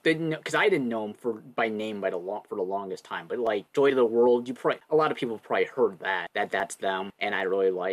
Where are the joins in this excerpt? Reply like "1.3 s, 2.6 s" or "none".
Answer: none